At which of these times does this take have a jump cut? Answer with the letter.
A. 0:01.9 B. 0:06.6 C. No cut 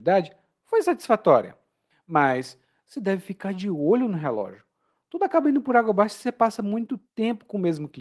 A